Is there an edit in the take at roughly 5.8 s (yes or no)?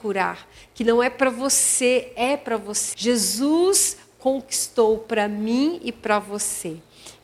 no